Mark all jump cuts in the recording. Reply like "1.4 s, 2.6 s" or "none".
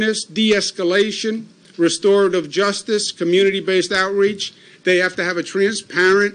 none